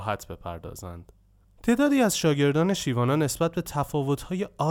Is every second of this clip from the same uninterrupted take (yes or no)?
yes